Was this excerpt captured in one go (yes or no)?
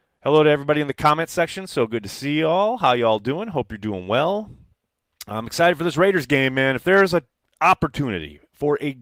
yes